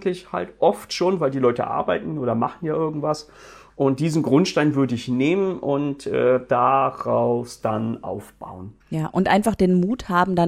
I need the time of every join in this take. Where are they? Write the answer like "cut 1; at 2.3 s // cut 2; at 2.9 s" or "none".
cut 1; at 8.8 s

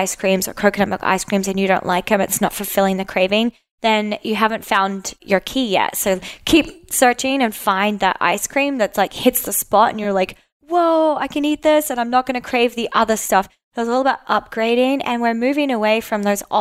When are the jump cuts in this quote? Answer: none

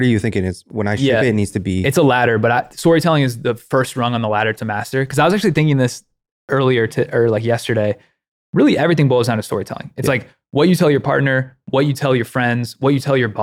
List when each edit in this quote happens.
none

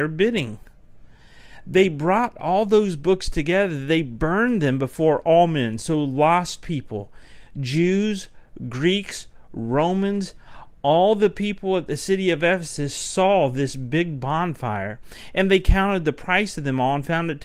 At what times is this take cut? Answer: none

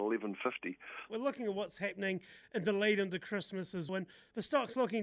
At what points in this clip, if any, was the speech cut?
cut 1; at 1.1 s // cut 2; at 3.9 s

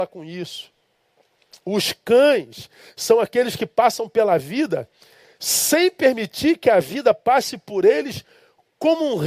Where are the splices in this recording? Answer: none

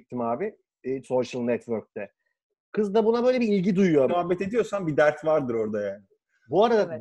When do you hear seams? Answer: cut 1; at 1.0 s // cut 2; at 2.5 s // cut 3; at 4.1 s

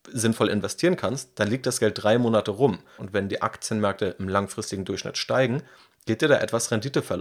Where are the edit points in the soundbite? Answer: cut 1; at 3.0 s

